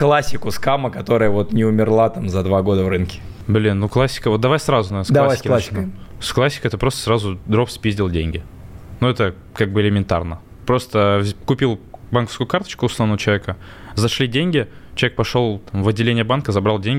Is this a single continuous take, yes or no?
yes